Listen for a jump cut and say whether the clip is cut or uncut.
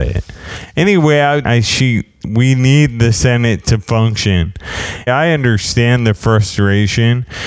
cut